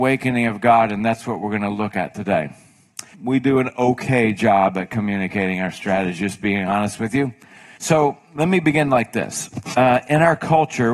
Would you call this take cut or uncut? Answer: cut